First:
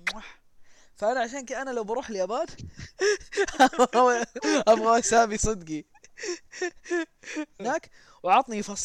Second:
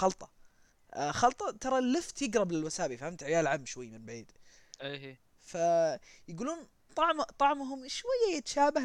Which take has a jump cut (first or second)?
first